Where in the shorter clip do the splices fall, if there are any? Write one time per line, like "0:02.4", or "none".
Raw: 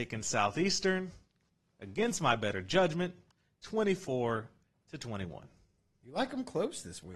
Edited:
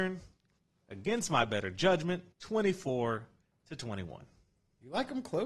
0:02.3